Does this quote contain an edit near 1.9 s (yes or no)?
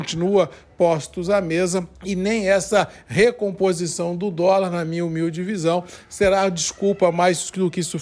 yes